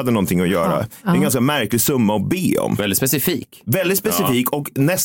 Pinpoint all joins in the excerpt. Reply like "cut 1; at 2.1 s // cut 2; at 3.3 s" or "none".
cut 1; at 1.0 s

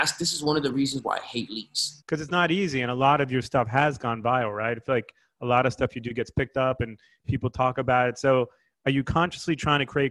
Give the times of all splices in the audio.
cut 1; at 2.0 s

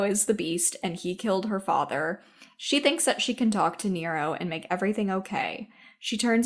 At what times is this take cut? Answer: none

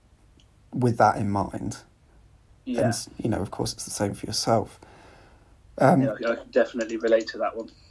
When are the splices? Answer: none

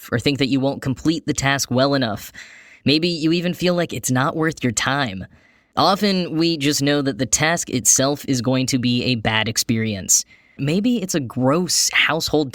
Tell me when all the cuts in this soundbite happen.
cut 1; at 10.6 s

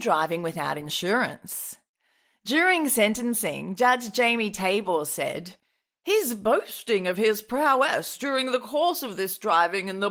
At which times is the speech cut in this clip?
none

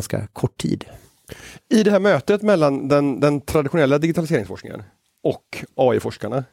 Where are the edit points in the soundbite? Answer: none

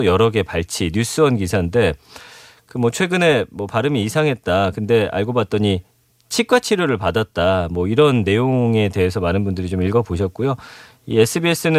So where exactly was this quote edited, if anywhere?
none

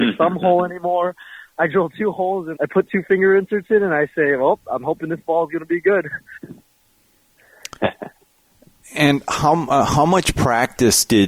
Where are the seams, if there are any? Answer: cut 1; at 2.5 s

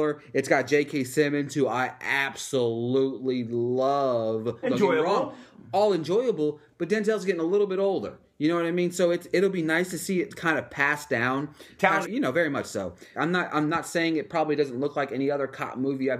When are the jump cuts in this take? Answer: cut 1; at 4.6 s // cut 2; at 12.0 s // cut 3; at 13.1 s

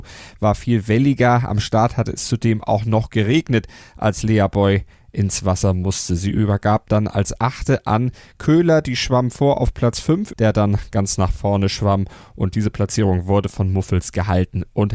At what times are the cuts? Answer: cut 1; at 10.3 s

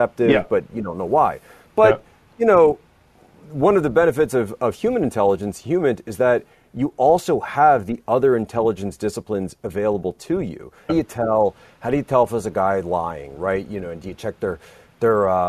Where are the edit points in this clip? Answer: cut 1; at 10.9 s

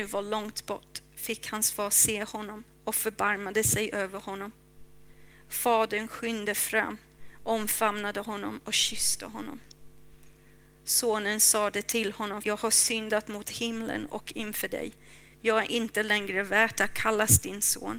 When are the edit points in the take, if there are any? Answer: cut 1; at 12.4 s // cut 2; at 15.3 s

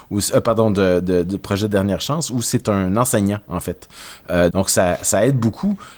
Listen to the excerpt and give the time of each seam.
cut 1; at 4.5 s

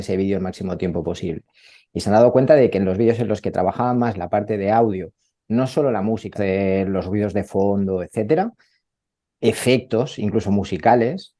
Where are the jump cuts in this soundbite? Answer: cut 1; at 6.3 s

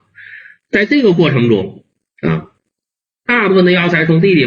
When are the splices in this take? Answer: cut 1; at 3.3 s

